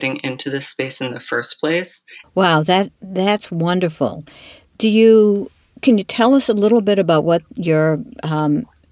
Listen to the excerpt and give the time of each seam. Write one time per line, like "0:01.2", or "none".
0:02.2